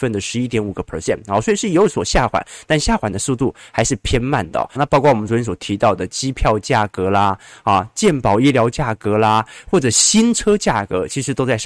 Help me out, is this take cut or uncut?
cut